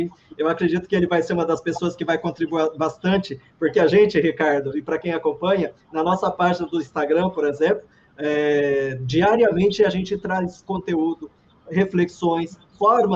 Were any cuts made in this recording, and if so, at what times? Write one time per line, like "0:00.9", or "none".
none